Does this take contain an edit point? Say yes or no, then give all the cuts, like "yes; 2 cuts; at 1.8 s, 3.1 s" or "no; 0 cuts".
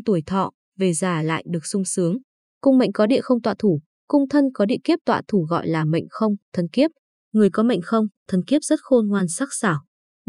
no; 0 cuts